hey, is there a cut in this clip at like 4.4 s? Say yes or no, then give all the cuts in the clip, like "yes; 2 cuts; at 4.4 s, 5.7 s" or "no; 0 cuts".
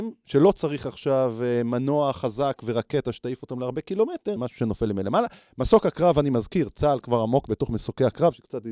yes; 1 cut; at 4.4 s